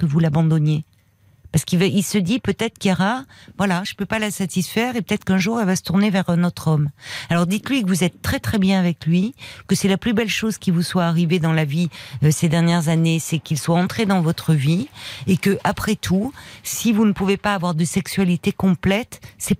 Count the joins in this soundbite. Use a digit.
0